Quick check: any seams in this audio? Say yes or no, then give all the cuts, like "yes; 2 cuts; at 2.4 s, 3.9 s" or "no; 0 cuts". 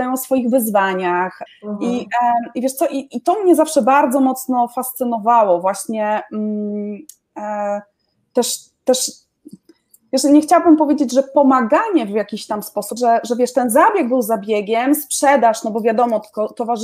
yes; 2 cuts; at 1.5 s, 13.0 s